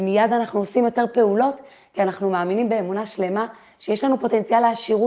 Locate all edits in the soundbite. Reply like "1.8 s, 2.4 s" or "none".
none